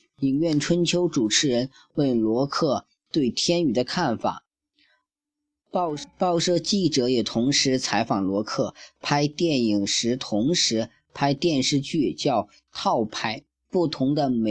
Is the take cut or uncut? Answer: uncut